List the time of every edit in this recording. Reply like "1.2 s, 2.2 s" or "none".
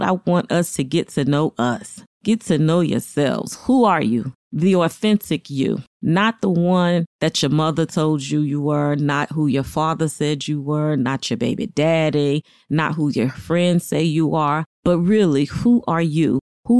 none